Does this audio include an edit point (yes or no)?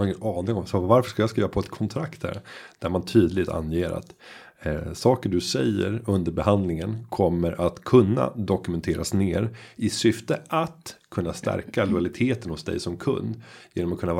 no